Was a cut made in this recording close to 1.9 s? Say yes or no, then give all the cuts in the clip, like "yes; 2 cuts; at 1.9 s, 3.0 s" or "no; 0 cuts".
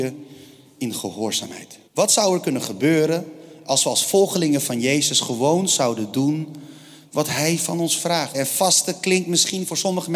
yes; 2 cuts; at 1.9 s, 8.3 s